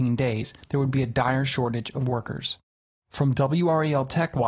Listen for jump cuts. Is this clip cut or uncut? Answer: uncut